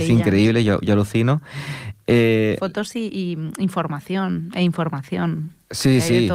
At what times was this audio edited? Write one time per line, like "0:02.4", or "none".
none